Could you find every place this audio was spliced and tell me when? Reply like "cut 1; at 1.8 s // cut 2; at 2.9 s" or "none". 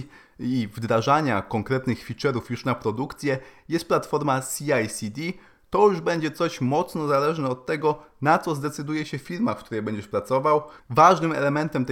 cut 1; at 10.8 s